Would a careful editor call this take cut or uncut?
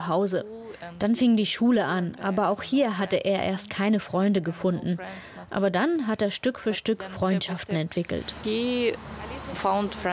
uncut